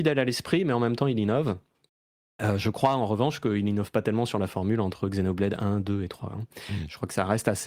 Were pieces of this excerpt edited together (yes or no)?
no